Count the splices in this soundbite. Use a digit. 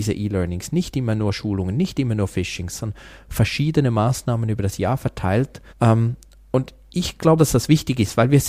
2